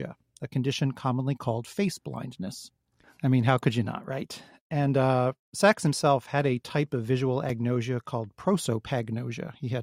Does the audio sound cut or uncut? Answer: cut